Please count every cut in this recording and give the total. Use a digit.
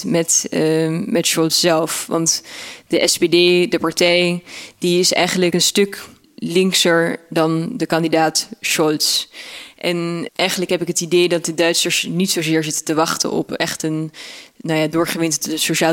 1